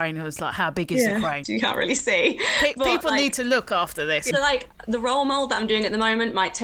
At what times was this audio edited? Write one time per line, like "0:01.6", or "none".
0:01.4
0:04.3

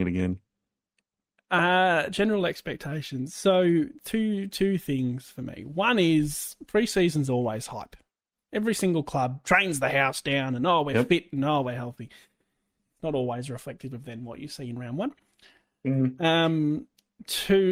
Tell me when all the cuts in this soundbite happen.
none

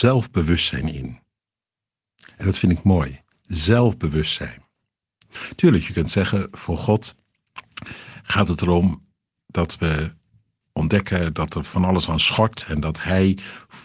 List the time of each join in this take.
none

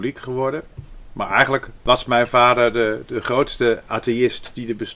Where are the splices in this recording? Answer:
none

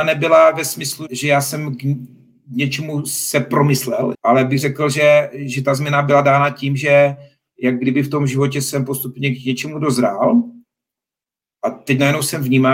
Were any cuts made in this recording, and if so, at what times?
0:01.1
0:04.1

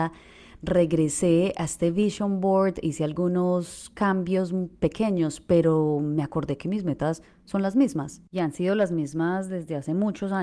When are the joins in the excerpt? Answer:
none

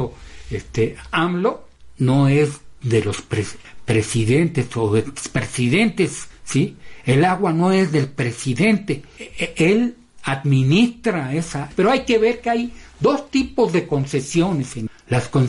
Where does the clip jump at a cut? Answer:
0:11.7

